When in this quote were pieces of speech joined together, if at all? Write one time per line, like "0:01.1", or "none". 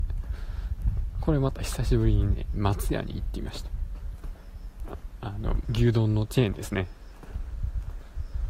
0:05.6